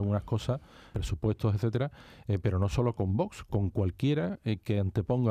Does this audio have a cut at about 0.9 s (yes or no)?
yes